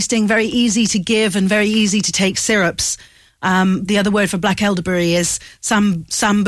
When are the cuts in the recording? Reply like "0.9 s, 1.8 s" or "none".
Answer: 3.9 s